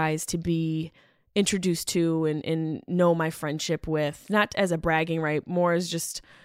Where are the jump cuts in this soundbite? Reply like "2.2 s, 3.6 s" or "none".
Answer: none